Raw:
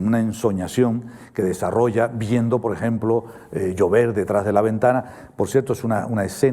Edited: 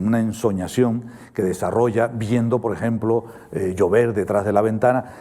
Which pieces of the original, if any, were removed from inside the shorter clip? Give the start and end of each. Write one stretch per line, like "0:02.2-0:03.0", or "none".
none